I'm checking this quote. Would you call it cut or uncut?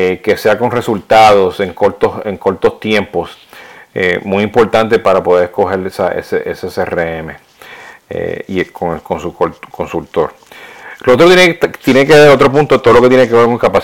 uncut